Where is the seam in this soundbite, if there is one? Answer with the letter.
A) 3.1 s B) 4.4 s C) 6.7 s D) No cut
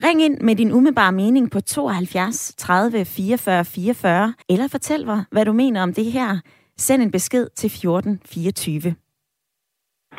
B